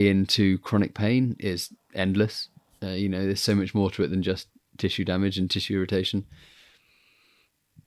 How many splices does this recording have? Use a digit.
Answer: 0